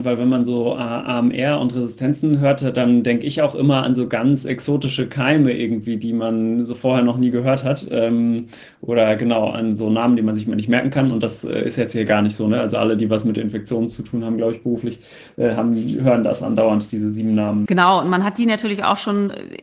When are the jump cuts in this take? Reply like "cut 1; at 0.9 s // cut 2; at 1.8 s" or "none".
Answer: cut 1; at 17.7 s